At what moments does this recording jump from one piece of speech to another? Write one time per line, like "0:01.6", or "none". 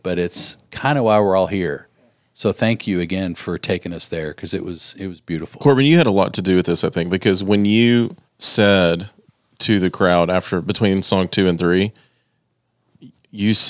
0:08.3